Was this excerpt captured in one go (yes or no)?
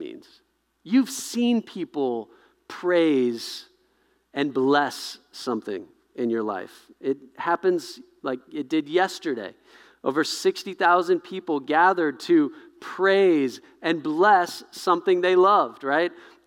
yes